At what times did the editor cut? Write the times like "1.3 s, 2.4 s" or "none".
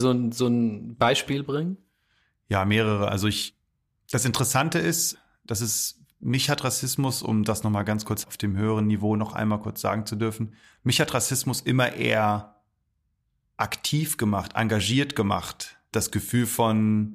none